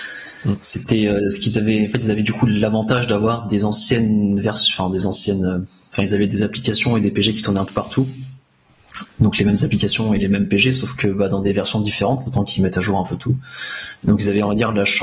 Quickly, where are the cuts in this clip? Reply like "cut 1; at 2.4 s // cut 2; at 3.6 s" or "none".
none